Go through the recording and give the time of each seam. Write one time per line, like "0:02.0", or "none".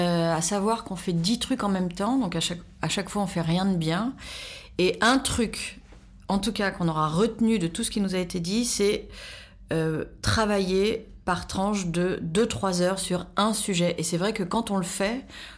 none